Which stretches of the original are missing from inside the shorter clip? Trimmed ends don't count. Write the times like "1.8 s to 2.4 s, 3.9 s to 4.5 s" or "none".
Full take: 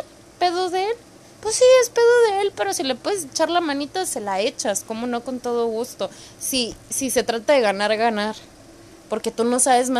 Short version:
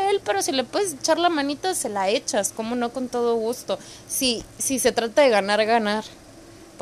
none